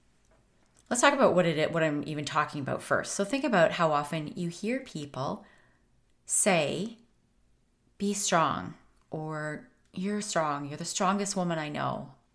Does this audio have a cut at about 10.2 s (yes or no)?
yes